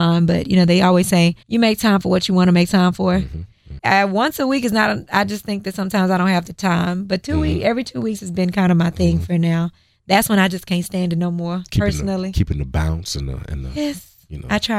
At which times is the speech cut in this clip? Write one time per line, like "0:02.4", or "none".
0:01.4
0:03.8